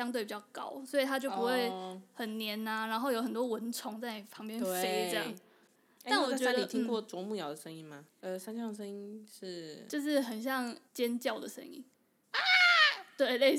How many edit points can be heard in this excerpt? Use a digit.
2